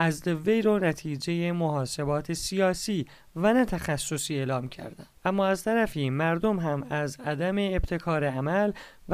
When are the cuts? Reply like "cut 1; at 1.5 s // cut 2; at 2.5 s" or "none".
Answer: none

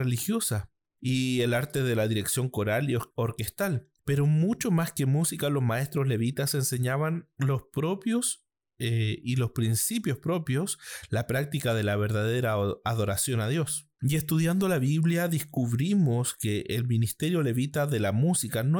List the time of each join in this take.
none

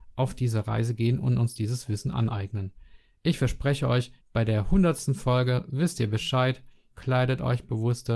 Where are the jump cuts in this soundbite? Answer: cut 1; at 4.2 s // cut 2; at 6.9 s

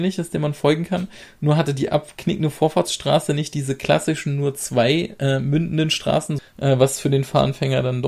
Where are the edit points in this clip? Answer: cut 1; at 6.4 s

